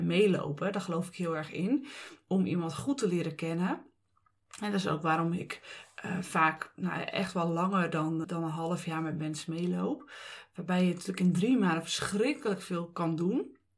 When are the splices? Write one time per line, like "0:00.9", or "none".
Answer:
0:08.2

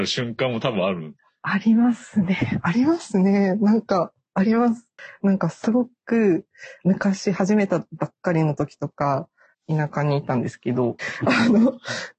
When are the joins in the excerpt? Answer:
0:06.8
0:09.5
0:11.0

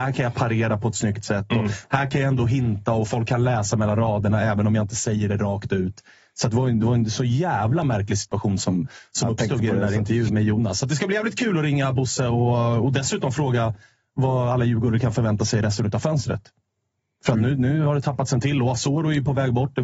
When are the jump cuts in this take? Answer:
0:10.3

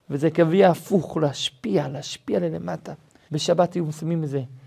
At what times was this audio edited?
0:03.3

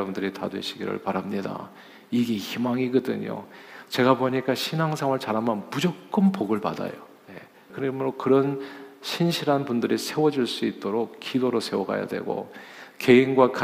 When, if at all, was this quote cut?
0:07.7

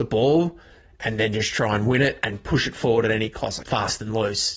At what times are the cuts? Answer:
0:03.6

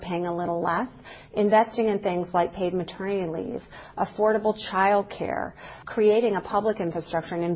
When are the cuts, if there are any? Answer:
0:05.8

